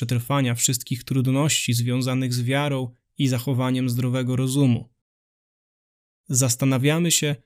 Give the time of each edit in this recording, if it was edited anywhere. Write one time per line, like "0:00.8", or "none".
none